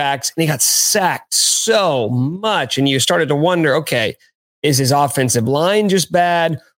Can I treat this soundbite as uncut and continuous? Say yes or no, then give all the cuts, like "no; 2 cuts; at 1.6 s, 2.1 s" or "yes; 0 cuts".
yes; 0 cuts